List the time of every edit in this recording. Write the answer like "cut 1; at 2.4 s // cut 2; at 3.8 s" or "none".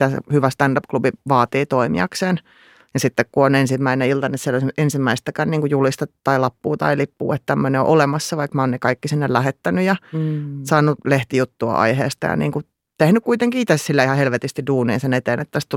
none